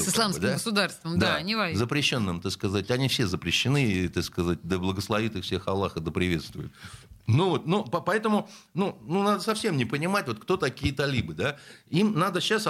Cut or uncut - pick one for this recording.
uncut